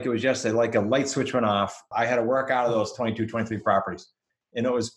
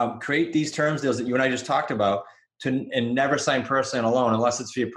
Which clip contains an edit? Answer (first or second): first